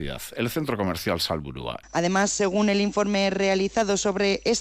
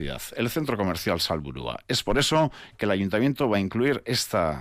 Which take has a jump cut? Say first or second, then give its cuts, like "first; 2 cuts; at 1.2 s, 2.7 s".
first; 1 cut; at 1.8 s